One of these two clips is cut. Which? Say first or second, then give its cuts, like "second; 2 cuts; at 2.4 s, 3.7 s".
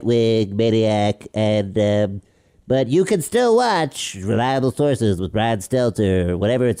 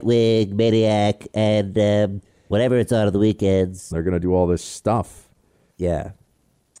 second; 3 cuts; at 2.5 s, 3.9 s, 5.7 s